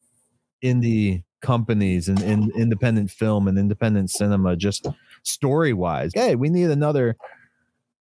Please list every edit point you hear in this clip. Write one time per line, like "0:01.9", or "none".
0:06.1

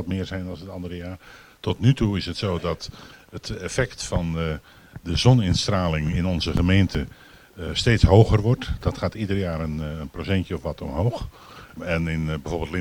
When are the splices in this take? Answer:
0:11.8

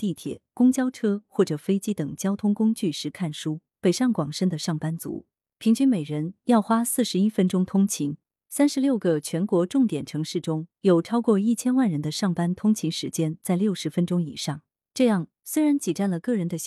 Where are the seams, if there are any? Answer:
0:03.7

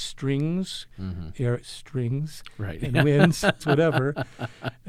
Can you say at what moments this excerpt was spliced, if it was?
0:01.6
0:03.6

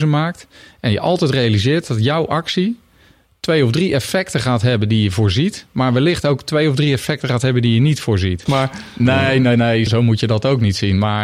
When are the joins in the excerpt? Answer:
0:08.5
0:09.9

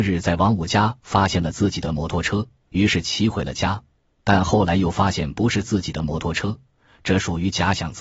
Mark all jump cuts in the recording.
none

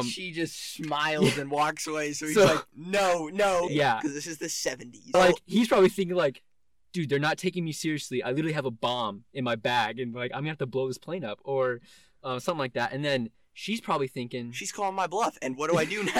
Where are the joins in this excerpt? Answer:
0:03.7
0:05.1

